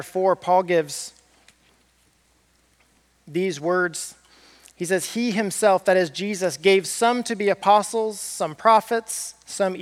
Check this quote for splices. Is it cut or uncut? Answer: uncut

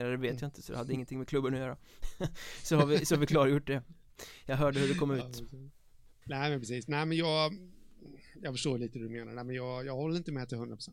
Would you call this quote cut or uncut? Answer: cut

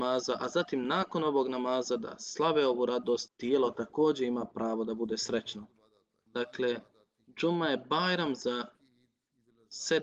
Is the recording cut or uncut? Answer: cut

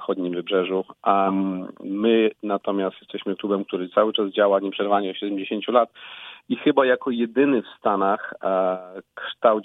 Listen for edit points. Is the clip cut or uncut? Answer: uncut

